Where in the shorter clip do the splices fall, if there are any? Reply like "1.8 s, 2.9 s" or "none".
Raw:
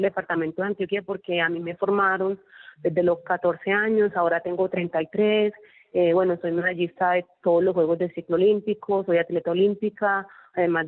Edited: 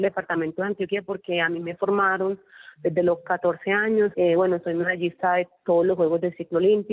4.1 s

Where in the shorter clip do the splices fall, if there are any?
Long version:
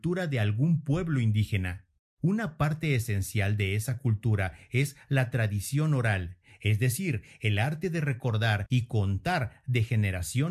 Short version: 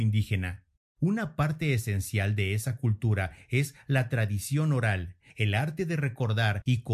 5.3 s

